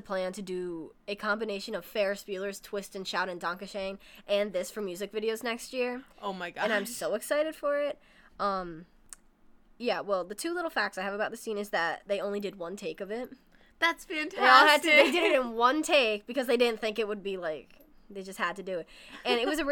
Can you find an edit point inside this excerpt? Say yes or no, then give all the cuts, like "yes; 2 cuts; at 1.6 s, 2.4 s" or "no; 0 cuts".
no; 0 cuts